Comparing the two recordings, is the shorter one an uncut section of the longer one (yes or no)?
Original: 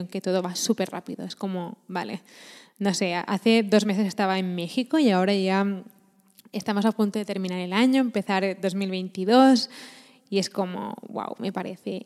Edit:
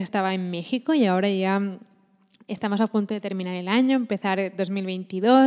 yes